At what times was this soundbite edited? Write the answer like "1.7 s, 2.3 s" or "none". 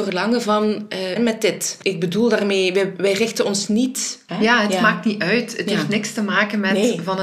1.2 s, 4.3 s